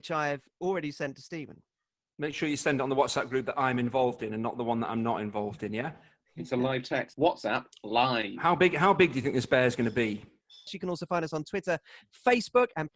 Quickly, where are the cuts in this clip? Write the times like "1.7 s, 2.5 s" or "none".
7.1 s, 10.7 s